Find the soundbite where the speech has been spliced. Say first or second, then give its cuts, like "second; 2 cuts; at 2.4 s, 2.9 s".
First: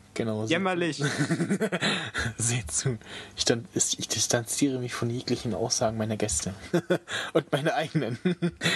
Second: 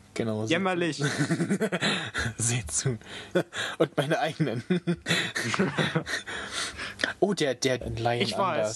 second; 2 cuts; at 3.3 s, 7.8 s